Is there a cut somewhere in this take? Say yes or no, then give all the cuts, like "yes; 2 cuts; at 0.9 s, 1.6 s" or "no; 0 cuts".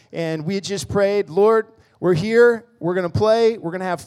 no; 0 cuts